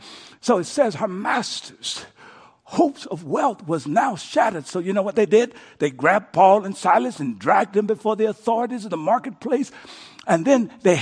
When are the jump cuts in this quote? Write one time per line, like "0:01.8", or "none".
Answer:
none